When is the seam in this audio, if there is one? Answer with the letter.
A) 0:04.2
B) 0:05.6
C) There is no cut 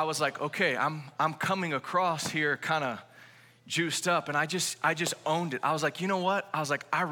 C